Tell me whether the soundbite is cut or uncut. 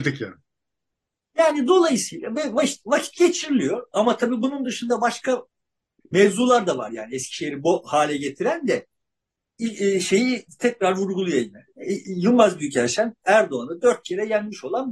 uncut